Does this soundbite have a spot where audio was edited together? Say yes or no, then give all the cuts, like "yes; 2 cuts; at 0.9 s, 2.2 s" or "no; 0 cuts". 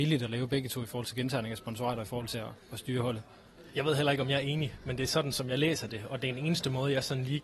no; 0 cuts